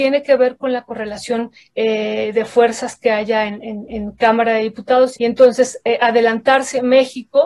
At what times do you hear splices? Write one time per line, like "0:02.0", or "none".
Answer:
0:05.2